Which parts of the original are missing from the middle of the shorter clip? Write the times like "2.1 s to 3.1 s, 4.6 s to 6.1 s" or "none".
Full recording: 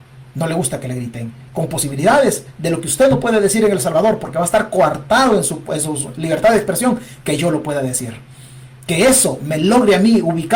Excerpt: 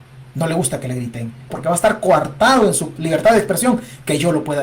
1.5 s to 4.2 s, 5.7 s to 6.1 s